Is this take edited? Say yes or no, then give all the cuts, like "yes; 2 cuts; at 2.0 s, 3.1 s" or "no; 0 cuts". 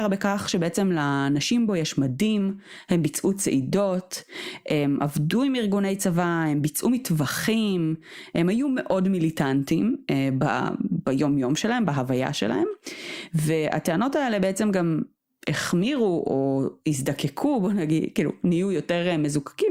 no; 0 cuts